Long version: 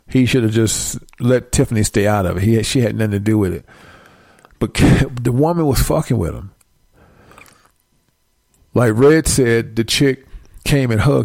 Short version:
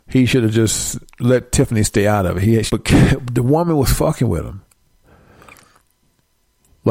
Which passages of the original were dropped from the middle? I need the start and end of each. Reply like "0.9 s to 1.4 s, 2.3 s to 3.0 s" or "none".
2.7 s to 4.6 s